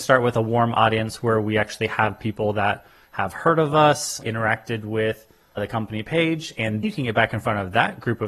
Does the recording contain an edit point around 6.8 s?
yes; 2 cuts; at 4.2 s, 6.8 s

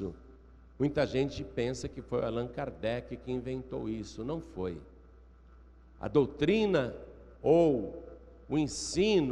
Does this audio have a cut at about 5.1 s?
no; 0 cuts

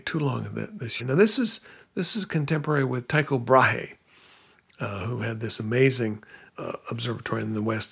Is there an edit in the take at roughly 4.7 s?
no; 2 cuts; at 1.0 s, 6.5 s

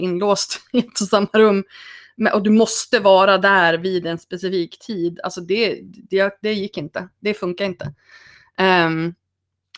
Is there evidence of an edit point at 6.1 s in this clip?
no; 0 cuts

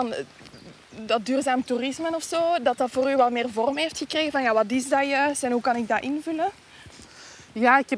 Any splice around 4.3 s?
no; 0 cuts

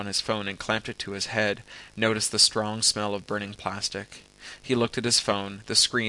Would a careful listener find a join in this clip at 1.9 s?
yes; 1 cut; at 1.9 s

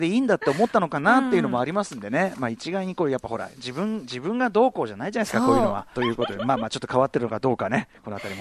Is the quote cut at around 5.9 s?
yes; 1 cut; at 5.9 s

